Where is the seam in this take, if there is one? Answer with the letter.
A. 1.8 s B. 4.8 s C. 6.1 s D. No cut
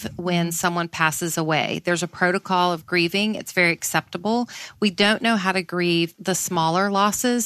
C